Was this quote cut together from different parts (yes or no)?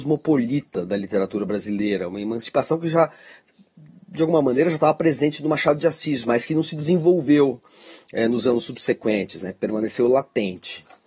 no